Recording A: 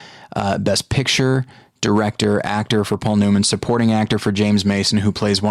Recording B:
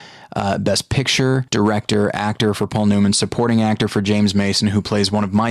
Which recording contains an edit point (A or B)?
B